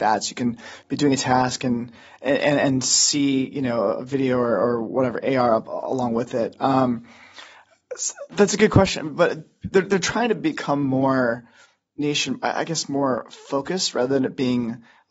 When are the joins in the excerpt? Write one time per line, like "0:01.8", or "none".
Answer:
none

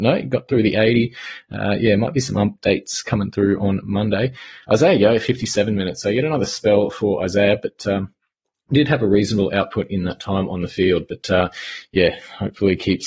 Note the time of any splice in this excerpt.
none

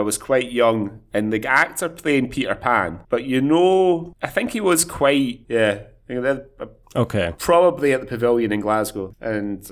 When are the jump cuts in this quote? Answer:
0:03.1
0:05.4

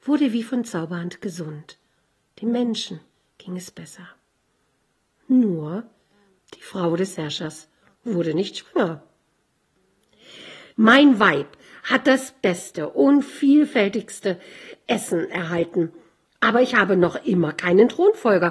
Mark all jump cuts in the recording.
0:10.7

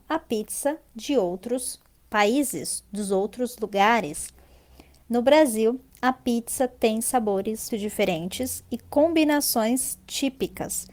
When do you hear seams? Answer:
0:07.7

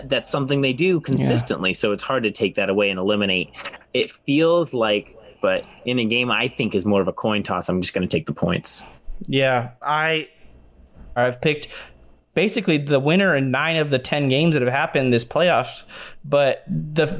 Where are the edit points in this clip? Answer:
0:05.3
0:11.2

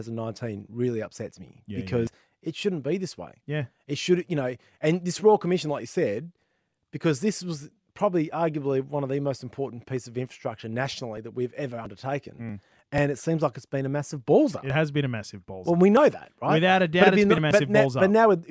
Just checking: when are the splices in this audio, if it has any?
none

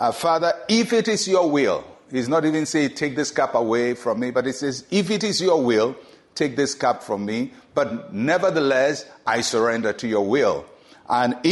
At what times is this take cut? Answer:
none

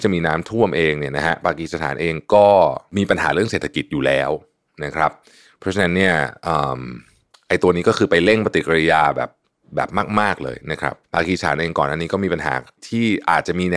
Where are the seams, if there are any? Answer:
0:11.0

